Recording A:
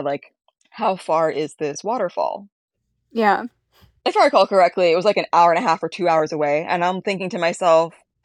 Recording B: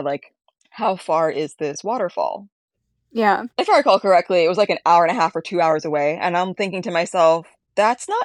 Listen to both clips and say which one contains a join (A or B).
B